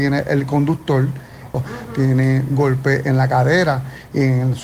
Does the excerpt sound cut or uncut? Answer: cut